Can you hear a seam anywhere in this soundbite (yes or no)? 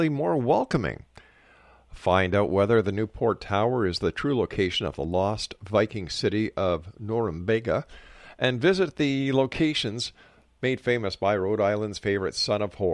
no